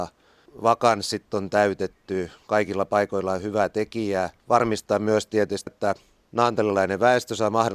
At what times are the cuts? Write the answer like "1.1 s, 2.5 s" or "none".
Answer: 4.4 s, 5.7 s